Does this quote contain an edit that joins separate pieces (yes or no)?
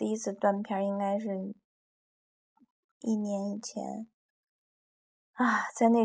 no